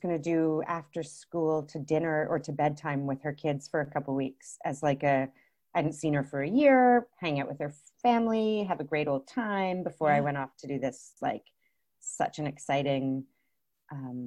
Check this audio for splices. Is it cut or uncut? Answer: uncut